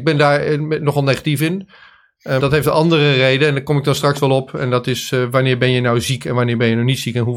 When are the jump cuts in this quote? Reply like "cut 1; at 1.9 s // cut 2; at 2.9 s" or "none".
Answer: cut 1; at 2.4 s

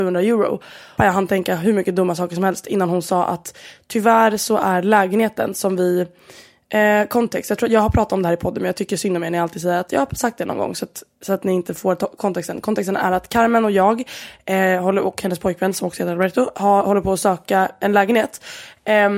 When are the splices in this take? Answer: cut 1; at 1.0 s

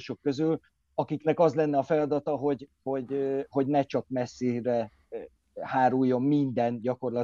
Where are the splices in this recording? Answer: none

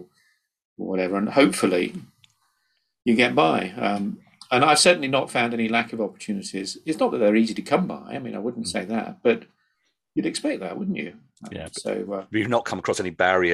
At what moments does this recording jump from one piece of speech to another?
none

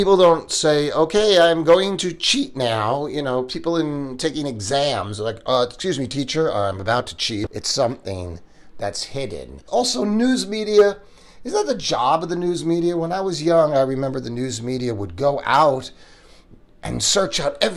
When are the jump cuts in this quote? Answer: cut 1; at 7.5 s // cut 2; at 9.7 s

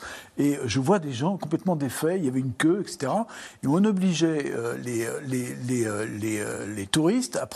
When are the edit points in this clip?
none

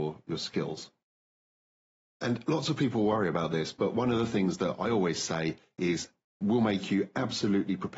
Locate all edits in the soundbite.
none

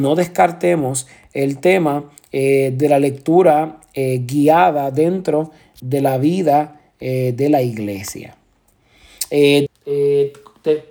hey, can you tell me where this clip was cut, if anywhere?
cut 1; at 9.7 s

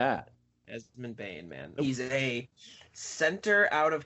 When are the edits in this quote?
cut 1; at 1.8 s

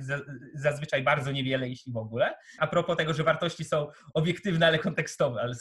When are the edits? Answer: cut 1; at 2.6 s

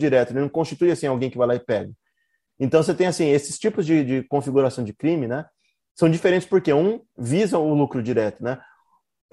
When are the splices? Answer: cut 1; at 2.5 s

